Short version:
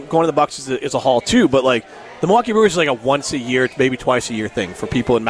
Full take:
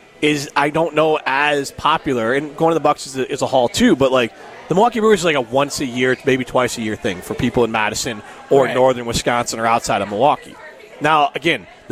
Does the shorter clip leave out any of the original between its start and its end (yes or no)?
no